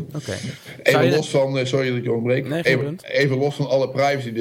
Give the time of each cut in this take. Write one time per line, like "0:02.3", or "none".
none